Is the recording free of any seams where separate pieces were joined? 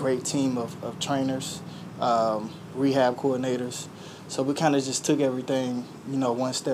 yes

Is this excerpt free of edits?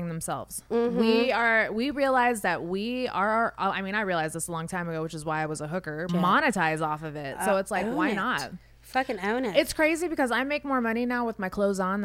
no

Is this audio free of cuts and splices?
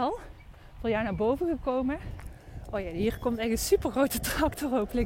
yes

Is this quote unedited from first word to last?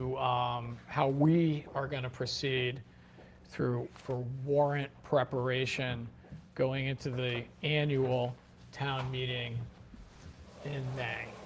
yes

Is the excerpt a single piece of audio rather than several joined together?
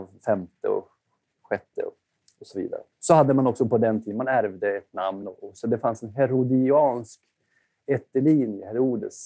yes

